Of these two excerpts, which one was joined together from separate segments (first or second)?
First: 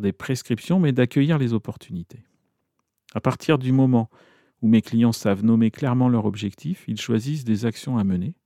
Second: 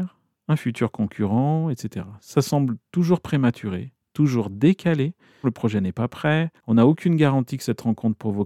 second